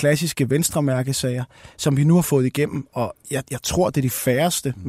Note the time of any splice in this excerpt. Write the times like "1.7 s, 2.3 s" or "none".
none